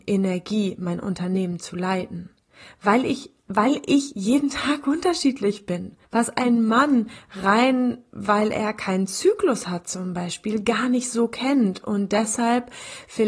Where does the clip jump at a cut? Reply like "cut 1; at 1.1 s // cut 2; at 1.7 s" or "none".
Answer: cut 1; at 6.0 s